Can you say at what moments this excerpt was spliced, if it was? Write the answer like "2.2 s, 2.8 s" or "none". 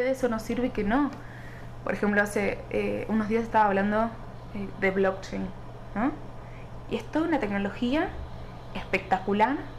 none